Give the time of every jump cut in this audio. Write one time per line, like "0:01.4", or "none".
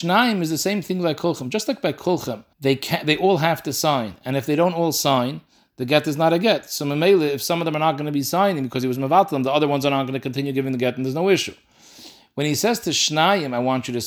0:02.5